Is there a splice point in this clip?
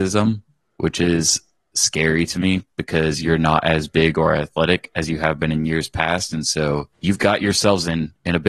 yes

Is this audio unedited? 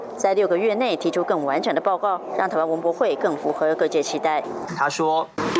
no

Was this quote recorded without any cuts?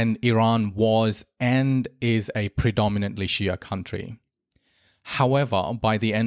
yes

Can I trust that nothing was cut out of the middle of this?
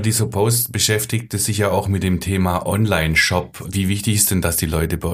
yes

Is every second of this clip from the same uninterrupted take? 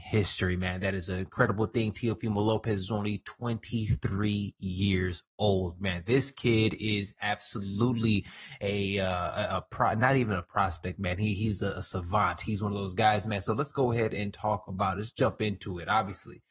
yes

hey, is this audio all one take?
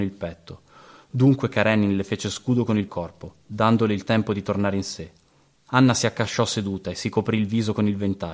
no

